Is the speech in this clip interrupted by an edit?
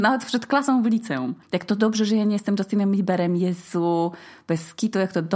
yes; 1 cut; at 1.4 s

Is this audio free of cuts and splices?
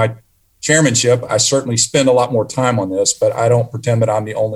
no; 1 cut; at 1.3 s

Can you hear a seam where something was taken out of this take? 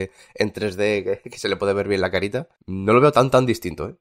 yes; 1 cut; at 2.6 s

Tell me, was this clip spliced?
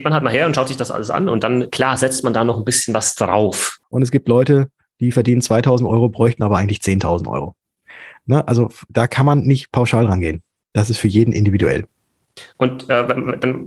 yes; 1 cut; at 3.8 s

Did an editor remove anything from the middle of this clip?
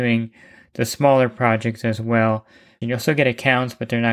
yes; 1 cut; at 2.8 s

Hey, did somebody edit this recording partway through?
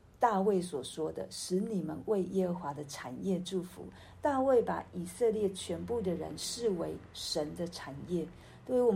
no; 0 cuts

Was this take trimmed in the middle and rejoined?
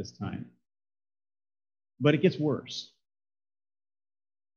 no; 0 cuts

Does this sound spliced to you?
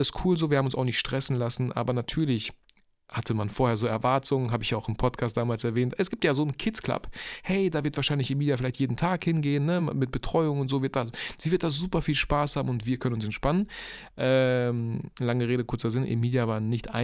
no; 0 cuts

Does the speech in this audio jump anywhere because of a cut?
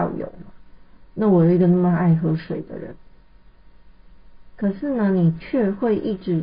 no; 0 cuts

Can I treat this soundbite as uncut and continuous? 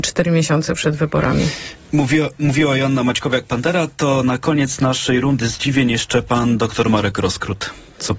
yes; 0 cuts

